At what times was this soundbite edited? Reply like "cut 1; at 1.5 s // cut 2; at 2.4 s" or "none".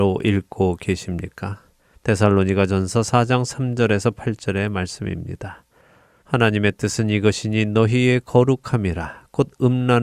cut 1; at 1.9 s // cut 2; at 6.2 s